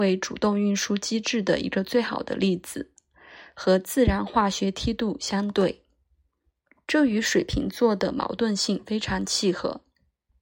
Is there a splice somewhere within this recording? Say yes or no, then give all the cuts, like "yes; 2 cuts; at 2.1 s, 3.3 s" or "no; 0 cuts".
no; 0 cuts